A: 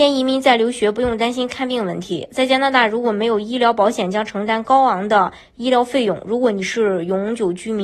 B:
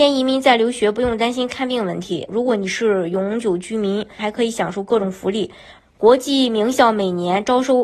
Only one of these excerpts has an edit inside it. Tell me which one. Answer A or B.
B